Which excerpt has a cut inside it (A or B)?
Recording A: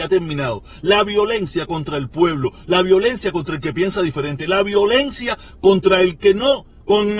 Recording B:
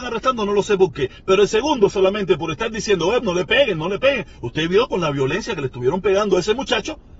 B